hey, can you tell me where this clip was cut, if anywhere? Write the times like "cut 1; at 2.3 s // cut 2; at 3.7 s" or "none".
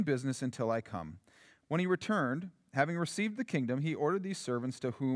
cut 1; at 1.6 s